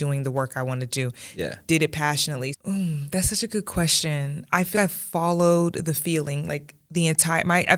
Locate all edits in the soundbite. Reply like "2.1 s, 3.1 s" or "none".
2.5 s, 4.7 s